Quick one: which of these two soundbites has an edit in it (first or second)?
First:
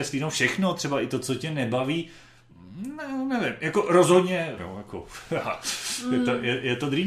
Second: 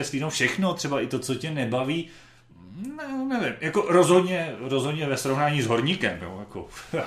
first